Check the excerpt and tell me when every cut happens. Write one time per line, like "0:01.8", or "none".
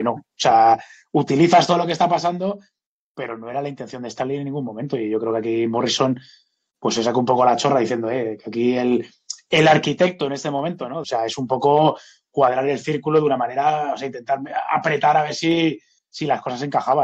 0:11.0